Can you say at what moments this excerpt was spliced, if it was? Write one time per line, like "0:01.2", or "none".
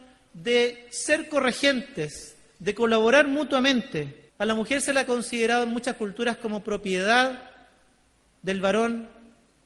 0:04.3